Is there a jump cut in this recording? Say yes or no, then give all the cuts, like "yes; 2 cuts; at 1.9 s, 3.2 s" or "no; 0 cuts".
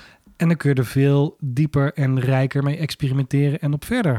no; 0 cuts